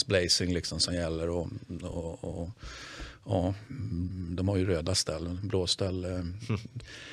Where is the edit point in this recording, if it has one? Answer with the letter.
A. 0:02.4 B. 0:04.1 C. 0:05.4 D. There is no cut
B